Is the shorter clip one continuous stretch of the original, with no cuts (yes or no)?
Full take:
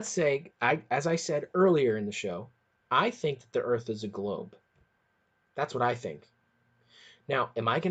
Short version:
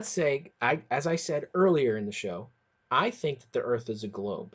yes